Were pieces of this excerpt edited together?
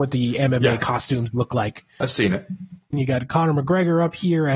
yes; 1 cut; at 2.9 s

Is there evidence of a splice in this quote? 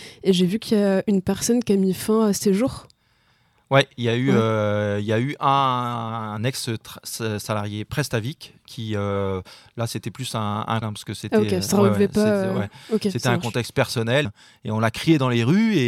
yes; 2 cuts; at 10.8 s, 14.2 s

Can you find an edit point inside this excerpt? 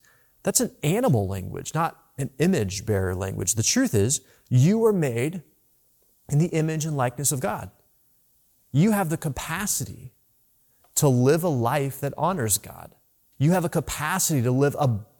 yes; 1 cut; at 13.3 s

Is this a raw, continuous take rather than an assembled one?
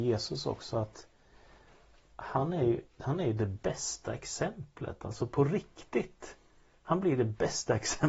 yes; 0 cuts

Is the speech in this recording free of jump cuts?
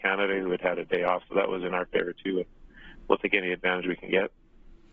yes; 0 cuts

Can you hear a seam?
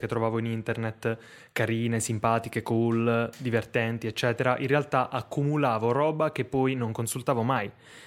no; 0 cuts

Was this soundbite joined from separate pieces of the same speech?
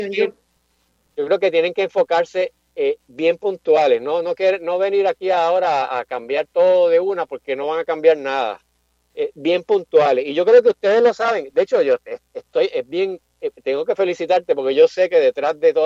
no; 0 cuts

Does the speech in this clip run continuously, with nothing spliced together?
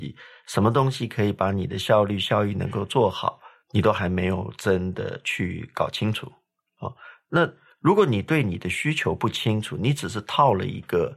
yes; 0 cuts

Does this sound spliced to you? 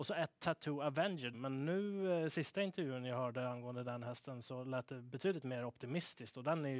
yes; 1 cut; at 1.3 s

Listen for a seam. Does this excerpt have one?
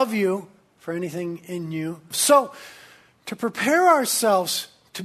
yes; 1 cut; at 2.1 s

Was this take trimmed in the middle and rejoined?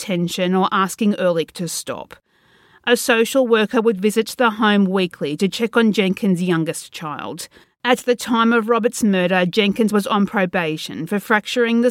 yes; 1 cut; at 7.6 s

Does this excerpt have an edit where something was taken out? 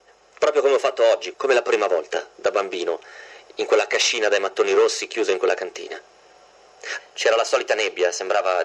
yes; 2 cuts; at 1.3 s, 7.0 s

